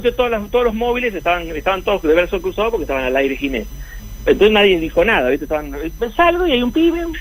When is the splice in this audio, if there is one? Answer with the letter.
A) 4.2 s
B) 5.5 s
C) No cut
C